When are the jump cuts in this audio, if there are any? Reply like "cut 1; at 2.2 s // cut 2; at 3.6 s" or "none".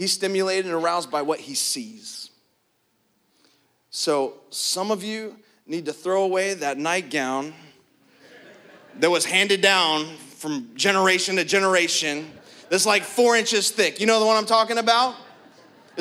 none